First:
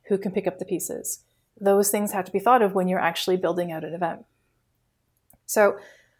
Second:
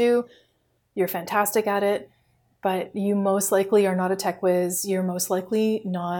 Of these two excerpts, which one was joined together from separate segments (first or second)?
first